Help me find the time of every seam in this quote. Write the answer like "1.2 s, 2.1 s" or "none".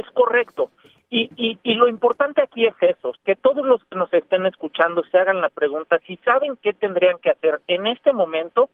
3.2 s